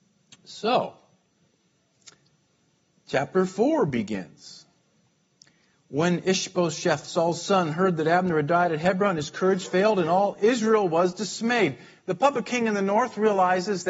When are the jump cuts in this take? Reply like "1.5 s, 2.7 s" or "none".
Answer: none